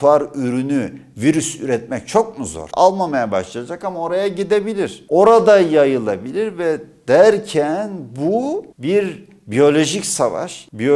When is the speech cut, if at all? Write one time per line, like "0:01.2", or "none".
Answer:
0:02.7